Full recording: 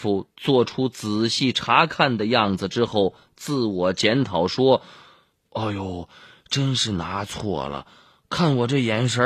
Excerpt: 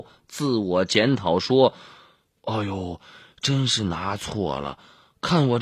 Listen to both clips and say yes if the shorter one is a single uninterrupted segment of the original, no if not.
yes